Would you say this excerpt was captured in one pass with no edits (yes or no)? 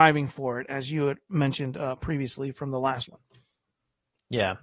yes